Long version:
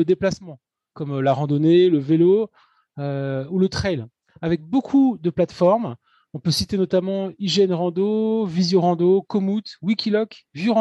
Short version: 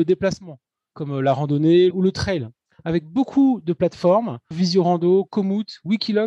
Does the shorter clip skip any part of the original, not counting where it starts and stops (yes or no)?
yes